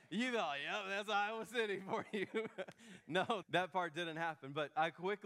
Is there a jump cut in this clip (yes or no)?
yes